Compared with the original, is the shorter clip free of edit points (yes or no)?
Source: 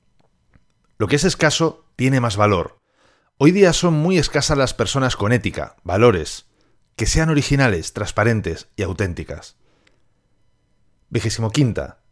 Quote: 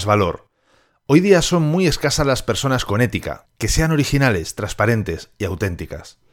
no